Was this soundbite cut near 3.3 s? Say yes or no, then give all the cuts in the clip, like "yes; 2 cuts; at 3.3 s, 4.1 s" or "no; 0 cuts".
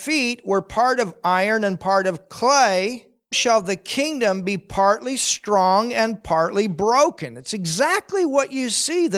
yes; 1 cut; at 3.3 s